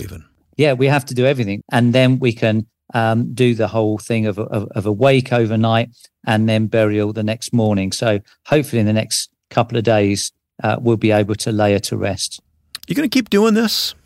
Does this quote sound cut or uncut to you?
cut